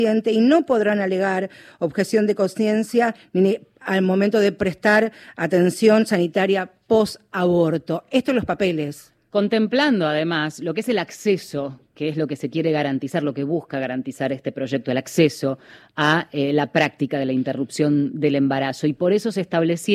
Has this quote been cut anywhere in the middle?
no; 0 cuts

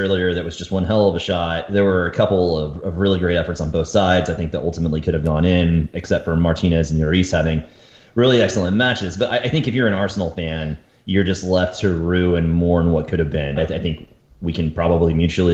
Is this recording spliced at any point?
yes; 1 cut; at 13.6 s

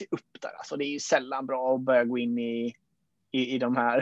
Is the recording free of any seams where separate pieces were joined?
yes; 0 cuts

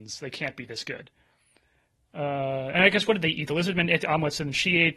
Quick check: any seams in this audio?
yes; 1 cut; at 2.7 s

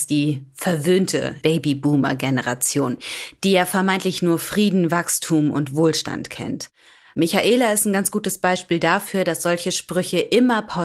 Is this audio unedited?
no; 1 cut; at 1.4 s

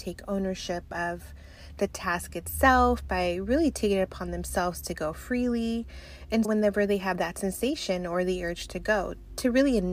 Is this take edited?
yes; 1 cut; at 6.4 s

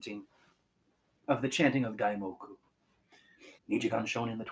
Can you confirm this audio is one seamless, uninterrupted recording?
no; 1 cut; at 3.6 s

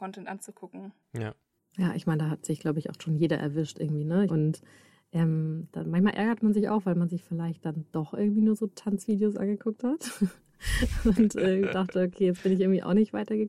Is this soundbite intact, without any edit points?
no; 1 cut; at 4.3 s

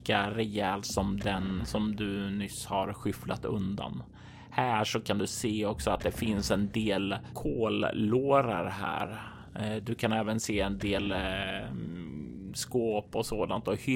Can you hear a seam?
no; 0 cuts

